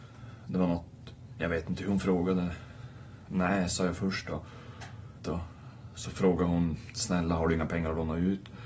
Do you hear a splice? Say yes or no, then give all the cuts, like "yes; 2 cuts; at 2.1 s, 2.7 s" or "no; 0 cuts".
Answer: yes; 1 cut; at 5.2 s